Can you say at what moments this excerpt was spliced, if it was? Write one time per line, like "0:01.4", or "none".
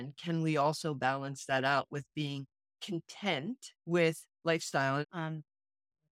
0:03.8
0:05.0